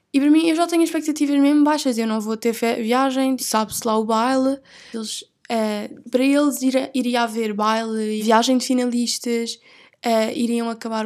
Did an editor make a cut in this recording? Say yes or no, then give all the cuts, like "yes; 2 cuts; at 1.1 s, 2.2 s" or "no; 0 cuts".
yes; 3 cuts; at 3.4 s, 4.9 s, 8.2 s